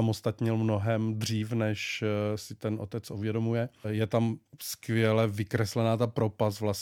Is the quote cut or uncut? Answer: uncut